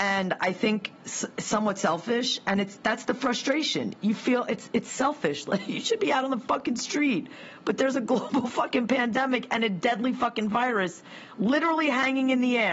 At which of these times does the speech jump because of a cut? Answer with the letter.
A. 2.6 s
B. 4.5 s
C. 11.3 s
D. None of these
D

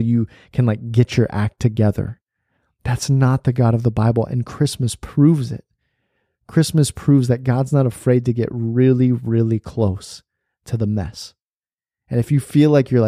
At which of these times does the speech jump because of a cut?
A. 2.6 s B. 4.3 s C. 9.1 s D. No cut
D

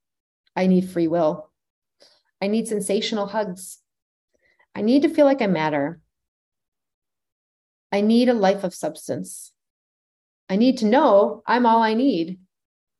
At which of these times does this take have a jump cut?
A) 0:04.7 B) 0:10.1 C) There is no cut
C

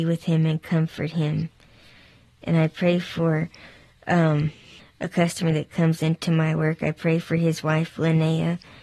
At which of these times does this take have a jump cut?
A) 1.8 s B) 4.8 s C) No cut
B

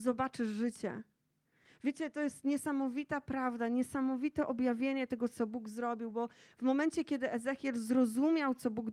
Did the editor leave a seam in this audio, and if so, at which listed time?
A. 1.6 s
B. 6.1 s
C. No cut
A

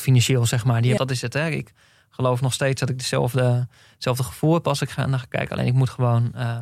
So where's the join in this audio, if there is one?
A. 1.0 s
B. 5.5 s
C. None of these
A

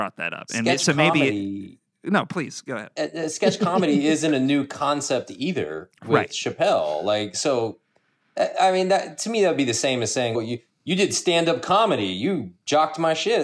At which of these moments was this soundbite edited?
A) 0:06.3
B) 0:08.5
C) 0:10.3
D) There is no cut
C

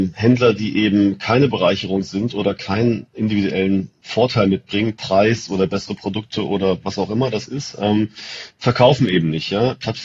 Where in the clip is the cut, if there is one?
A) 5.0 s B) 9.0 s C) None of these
C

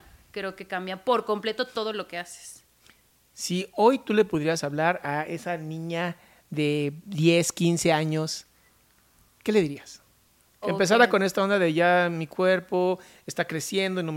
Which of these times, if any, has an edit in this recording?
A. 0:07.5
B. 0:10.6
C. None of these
B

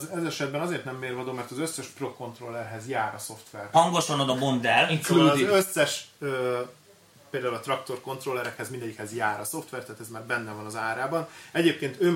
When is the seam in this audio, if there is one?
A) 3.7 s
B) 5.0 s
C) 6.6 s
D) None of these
A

